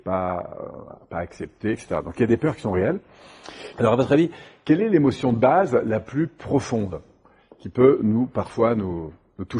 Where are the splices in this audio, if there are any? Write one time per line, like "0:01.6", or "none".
0:01.7
0:03.7